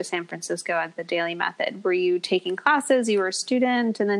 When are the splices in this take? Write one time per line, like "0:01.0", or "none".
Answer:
none